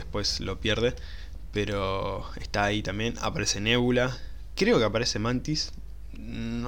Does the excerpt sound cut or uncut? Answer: uncut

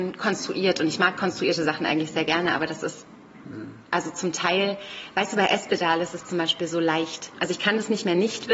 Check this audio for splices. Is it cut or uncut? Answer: cut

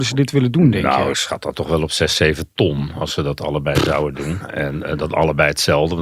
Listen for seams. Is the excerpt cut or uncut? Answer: uncut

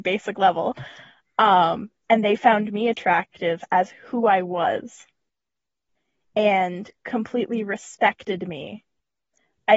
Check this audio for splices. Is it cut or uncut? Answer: uncut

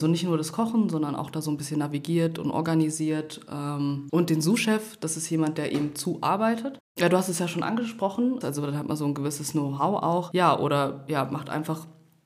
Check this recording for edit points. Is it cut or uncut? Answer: cut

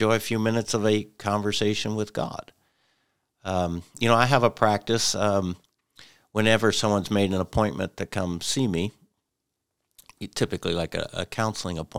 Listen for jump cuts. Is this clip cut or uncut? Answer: uncut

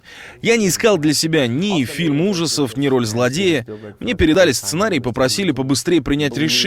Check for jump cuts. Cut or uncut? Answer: uncut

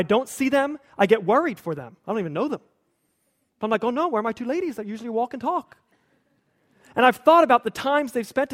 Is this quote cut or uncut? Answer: uncut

